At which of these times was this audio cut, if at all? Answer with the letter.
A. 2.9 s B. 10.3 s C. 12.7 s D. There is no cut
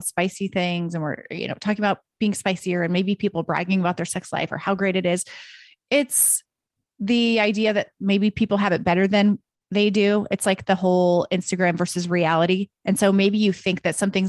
D